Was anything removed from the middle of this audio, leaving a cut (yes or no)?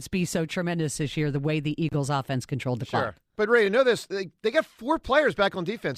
no